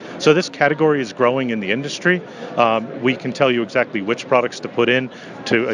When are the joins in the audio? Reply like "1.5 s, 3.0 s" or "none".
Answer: none